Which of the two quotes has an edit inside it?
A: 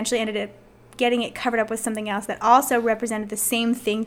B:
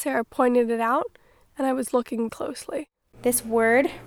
B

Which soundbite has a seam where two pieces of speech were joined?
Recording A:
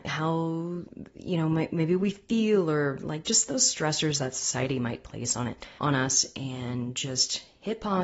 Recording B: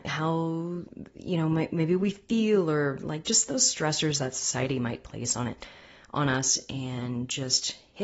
A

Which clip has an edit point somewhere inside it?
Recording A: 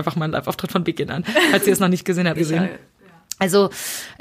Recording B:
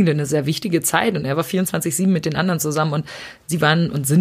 A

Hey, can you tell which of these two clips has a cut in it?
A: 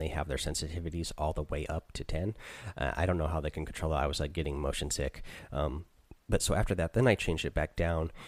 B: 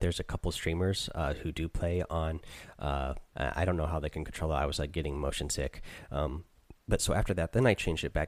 B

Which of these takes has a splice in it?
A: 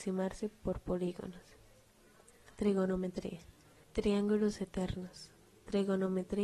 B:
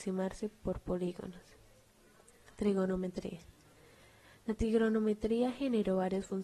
A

